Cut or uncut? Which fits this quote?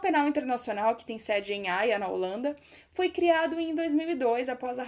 uncut